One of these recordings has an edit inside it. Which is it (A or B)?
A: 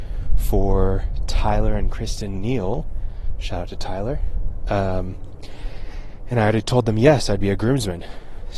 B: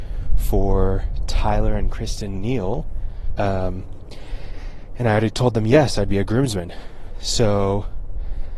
B